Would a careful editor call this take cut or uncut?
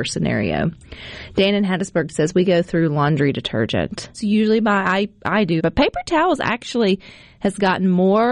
cut